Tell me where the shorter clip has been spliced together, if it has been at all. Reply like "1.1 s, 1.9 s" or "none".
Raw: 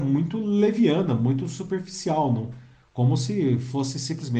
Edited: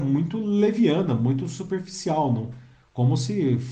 none